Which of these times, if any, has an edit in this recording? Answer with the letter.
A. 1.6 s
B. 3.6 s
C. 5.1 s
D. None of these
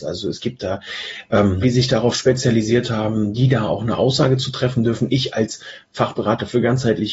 A